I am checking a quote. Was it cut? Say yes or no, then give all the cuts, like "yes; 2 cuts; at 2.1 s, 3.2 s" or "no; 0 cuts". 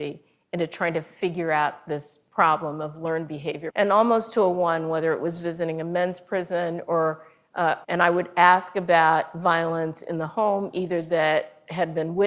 yes; 2 cuts; at 3.7 s, 7.8 s